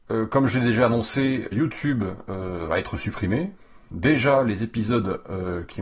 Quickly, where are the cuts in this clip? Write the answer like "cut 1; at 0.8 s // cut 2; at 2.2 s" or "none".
cut 1; at 1.5 s

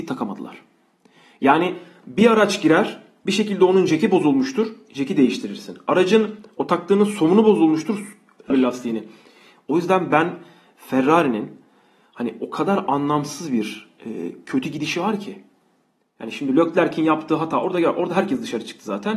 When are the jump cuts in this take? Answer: cut 1; at 8.5 s

